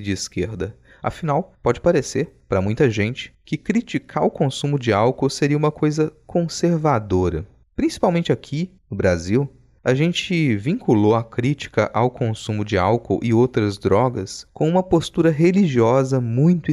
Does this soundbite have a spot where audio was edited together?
no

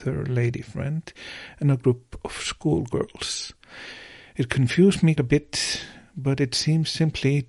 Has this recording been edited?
yes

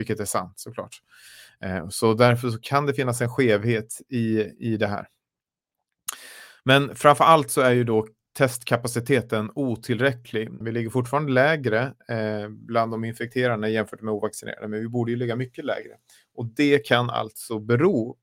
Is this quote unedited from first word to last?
no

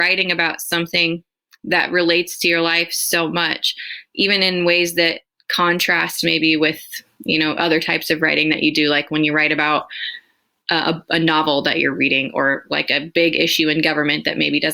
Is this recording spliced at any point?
no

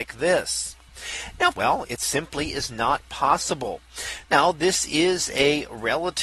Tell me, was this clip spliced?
yes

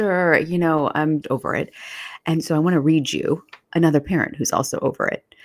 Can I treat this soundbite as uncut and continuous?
no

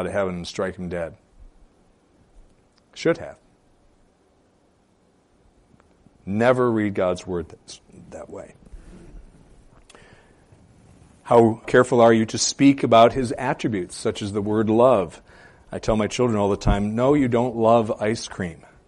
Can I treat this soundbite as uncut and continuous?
no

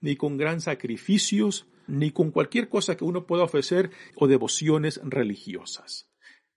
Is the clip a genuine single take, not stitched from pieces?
no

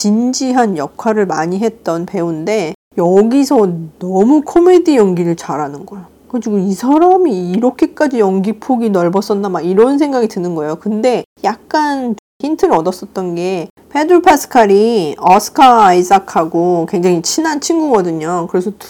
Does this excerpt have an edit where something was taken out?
no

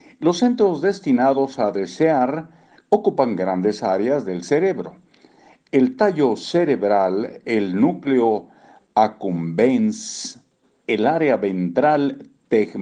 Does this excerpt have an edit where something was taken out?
no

